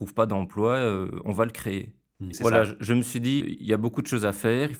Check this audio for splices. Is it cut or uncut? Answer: cut